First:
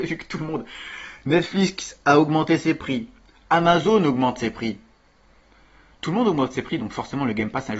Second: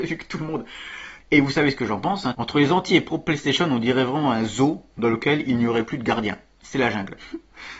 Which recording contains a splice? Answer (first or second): second